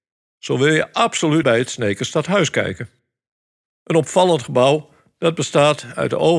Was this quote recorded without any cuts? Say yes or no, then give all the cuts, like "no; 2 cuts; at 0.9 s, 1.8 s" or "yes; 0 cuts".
no; 1 cut; at 1.4 s